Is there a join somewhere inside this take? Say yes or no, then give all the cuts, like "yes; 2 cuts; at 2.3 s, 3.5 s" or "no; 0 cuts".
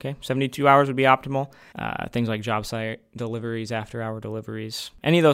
yes; 1 cut; at 1.7 s